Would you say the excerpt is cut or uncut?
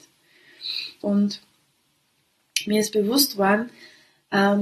cut